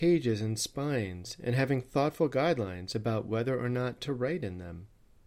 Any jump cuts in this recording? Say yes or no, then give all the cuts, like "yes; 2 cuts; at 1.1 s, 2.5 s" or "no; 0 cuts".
no; 0 cuts